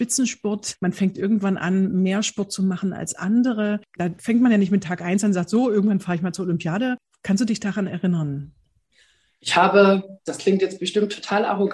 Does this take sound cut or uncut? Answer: uncut